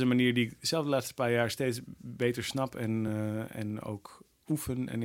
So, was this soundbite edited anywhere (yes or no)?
no